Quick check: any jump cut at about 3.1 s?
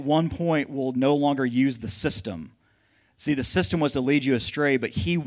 no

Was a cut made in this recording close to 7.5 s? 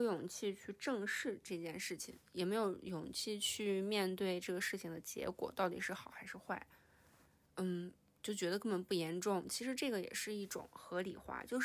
yes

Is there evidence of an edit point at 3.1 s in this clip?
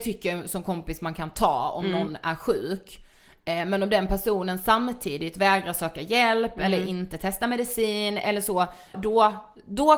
no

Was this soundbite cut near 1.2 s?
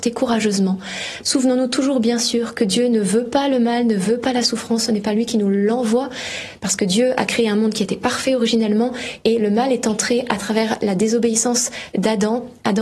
yes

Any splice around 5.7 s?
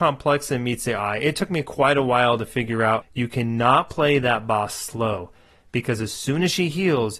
no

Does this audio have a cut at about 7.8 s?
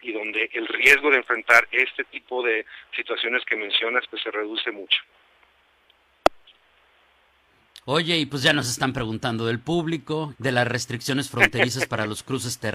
yes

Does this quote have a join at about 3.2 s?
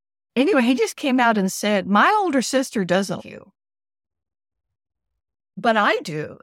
yes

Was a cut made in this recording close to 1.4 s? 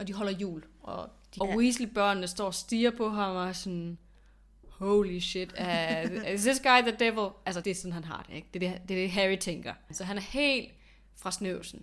yes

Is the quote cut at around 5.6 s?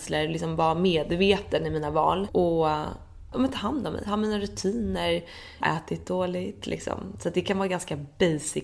yes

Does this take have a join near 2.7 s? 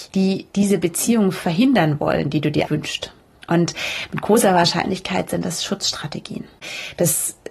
yes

